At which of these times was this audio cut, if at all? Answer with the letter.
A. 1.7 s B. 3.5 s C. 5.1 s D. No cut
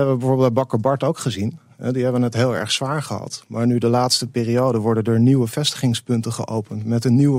D